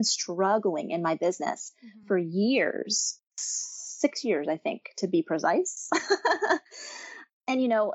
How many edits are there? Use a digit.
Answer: 0